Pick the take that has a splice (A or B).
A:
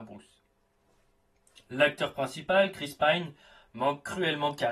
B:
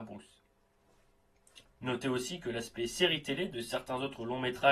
B